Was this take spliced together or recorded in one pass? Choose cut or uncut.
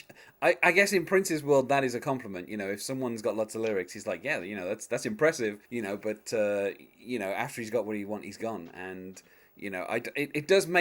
cut